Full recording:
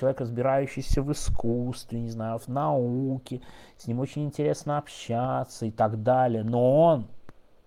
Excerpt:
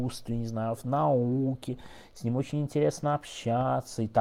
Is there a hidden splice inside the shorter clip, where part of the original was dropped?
no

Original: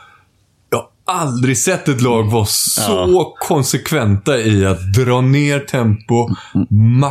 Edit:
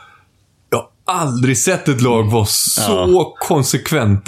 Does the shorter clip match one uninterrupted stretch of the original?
yes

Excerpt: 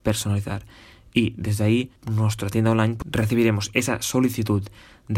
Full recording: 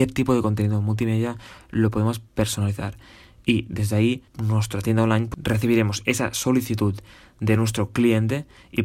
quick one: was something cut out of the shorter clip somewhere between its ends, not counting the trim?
no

